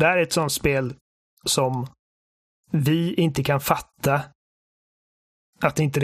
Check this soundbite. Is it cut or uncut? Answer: uncut